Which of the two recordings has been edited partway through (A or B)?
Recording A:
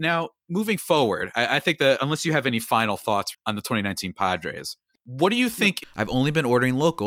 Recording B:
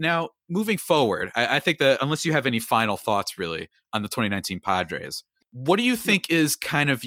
A